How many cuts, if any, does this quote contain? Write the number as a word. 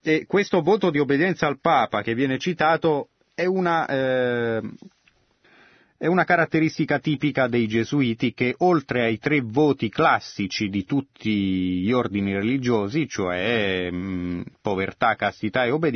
zero